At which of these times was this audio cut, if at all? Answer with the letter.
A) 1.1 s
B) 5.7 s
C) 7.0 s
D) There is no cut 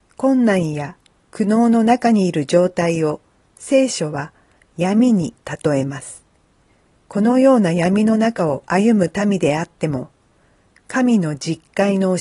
C